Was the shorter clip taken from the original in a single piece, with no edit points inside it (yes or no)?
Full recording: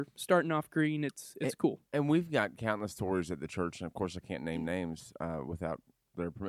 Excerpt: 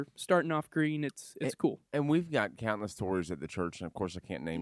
yes